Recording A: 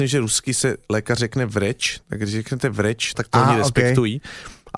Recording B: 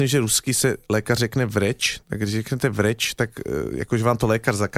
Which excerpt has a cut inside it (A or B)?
A